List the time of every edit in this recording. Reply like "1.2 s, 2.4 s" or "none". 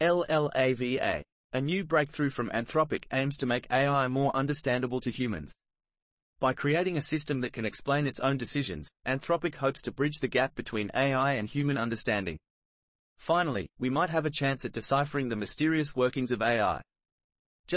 1.3 s